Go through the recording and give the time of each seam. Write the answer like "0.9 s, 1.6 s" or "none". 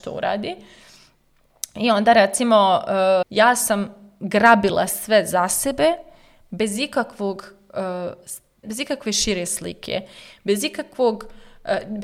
3.2 s, 8.6 s